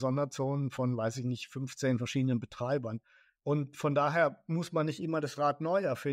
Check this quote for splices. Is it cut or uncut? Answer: cut